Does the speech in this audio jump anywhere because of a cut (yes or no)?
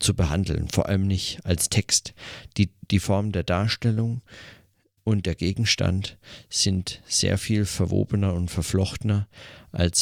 no